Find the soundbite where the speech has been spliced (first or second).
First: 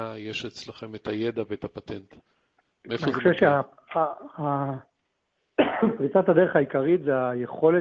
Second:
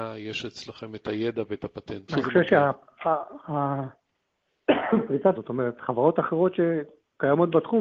second